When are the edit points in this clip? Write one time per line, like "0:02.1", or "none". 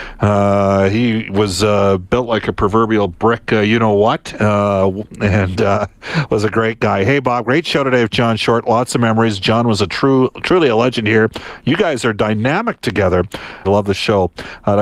0:13.6